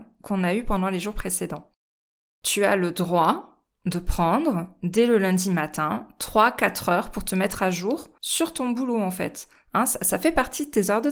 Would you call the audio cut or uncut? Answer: uncut